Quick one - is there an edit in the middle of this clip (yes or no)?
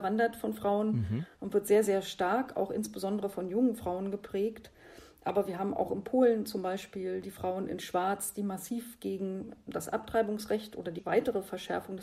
no